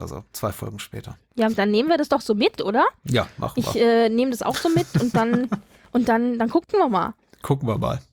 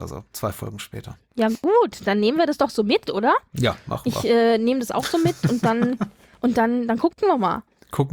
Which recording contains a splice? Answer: first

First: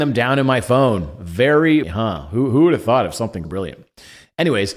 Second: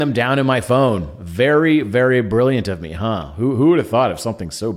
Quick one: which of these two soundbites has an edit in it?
first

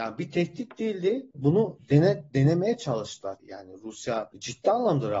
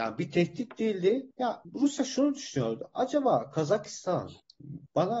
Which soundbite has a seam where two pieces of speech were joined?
first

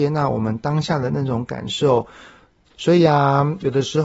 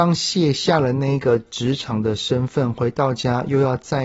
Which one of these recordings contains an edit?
first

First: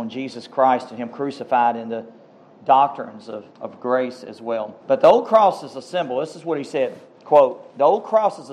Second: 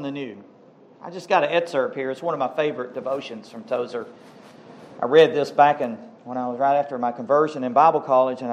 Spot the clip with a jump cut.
first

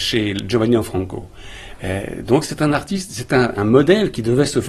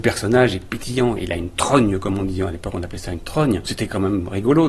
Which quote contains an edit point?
second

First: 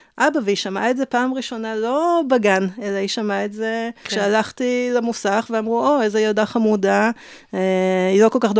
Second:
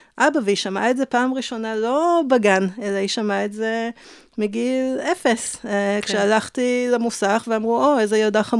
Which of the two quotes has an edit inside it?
first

